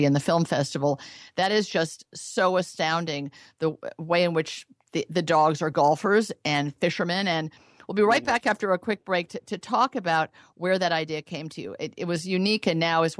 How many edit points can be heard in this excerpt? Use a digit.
0